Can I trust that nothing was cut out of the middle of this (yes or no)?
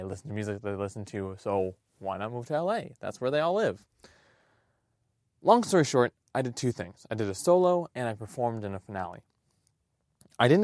yes